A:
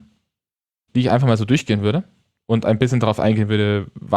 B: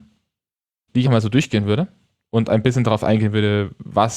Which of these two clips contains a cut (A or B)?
B